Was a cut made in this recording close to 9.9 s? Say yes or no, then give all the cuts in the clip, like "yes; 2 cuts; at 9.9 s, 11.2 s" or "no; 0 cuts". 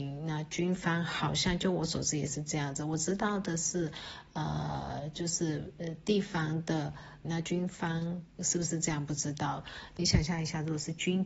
no; 1 cut; at 7.2 s